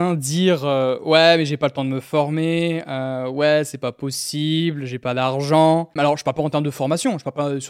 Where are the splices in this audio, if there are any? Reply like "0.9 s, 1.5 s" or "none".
6.0 s